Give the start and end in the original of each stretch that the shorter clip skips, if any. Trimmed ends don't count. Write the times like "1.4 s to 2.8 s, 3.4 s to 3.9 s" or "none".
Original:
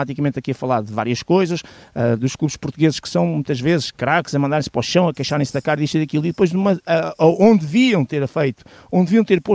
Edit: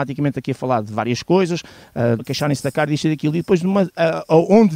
2.2 s to 5.1 s

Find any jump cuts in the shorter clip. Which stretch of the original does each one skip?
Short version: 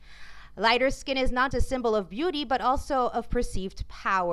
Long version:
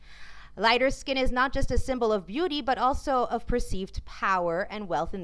1.5 s to 1.7 s

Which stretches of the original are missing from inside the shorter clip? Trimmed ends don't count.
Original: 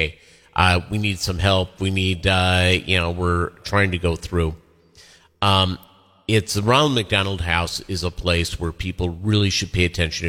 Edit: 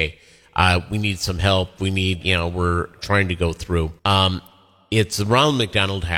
2.2 s to 2.8 s, 4.6 s to 5.4 s

